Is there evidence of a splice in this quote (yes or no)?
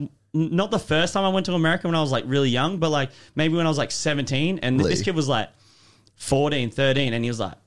yes